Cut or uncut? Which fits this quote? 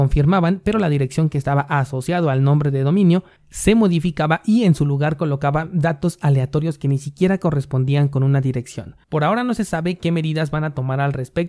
cut